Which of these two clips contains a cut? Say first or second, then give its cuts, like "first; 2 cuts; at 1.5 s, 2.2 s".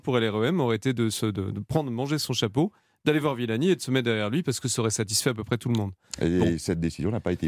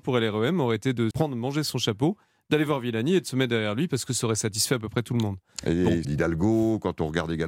second; 2 cuts; at 1.1 s, 6.0 s